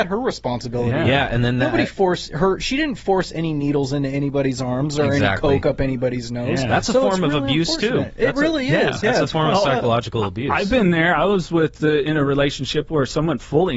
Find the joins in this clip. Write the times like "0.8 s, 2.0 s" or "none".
none